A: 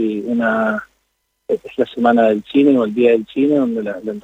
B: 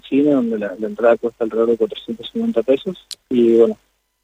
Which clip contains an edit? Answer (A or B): B